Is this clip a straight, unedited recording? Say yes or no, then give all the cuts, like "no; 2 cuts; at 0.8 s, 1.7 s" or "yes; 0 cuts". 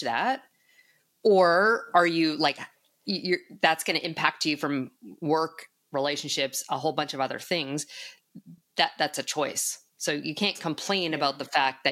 yes; 0 cuts